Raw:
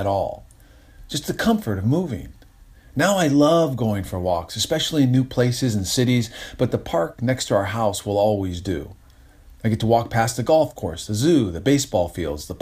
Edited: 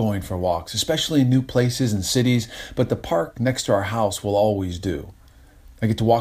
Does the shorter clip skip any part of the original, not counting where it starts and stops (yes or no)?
no